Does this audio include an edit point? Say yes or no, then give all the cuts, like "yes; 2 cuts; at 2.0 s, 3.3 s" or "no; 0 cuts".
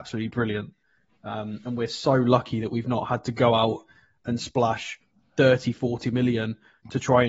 no; 0 cuts